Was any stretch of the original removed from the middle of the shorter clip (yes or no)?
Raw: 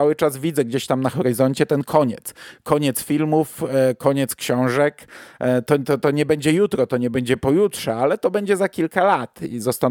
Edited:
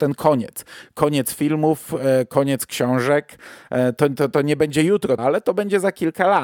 yes